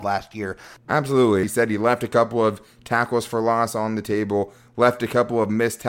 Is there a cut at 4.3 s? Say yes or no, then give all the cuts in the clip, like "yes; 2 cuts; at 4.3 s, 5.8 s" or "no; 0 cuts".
no; 1 cut; at 1.4 s